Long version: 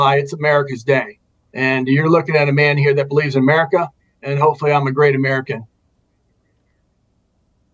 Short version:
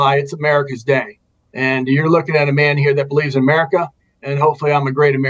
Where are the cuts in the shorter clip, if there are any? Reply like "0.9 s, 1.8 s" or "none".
none

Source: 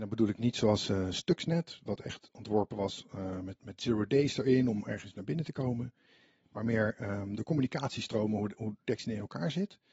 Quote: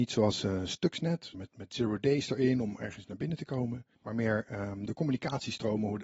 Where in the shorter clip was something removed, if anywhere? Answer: 1.3 s, 3.9 s

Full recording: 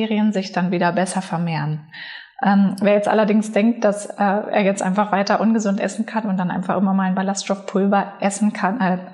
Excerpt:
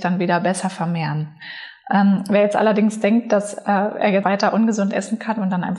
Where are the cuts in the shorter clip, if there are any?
4.2 s

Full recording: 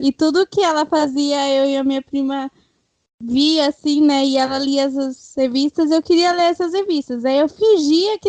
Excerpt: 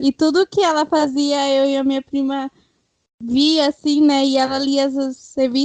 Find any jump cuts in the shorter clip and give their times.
none

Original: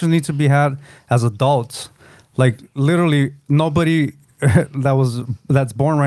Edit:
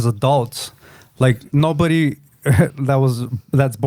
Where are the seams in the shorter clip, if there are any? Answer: 1.5 s

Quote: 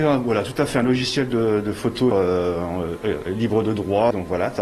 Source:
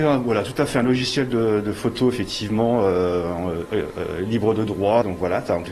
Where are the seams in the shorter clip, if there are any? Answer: 2.1 s, 3.3 s

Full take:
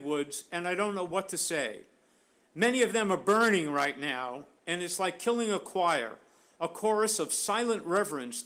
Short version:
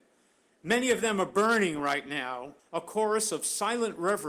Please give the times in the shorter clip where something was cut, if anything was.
2.6 s

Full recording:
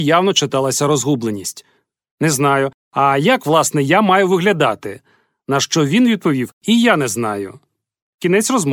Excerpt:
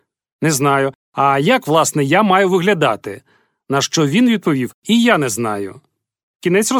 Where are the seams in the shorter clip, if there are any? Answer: none

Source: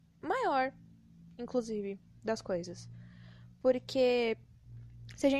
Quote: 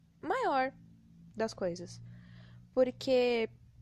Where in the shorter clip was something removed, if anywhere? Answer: 1.3 s

